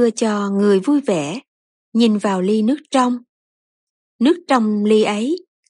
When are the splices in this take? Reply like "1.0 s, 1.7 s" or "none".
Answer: none